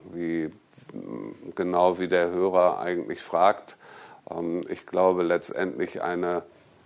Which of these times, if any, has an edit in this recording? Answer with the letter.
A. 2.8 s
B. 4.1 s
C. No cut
B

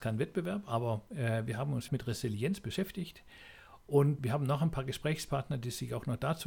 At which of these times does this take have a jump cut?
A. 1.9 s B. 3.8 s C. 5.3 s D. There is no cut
A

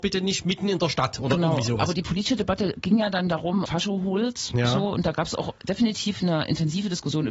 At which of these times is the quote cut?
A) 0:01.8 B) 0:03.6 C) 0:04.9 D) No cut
B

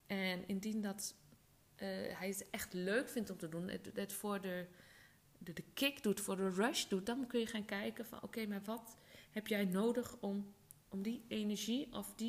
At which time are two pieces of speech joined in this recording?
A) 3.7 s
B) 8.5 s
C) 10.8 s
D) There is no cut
C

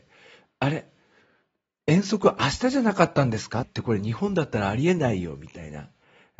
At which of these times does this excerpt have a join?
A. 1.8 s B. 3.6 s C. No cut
B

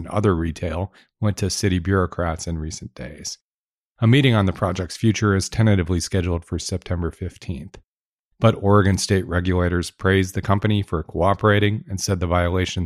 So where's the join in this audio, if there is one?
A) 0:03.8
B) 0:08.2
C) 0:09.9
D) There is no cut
B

